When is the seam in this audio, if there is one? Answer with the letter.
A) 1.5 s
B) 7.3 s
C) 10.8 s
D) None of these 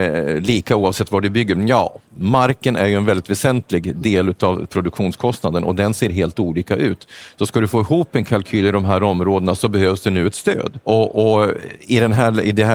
C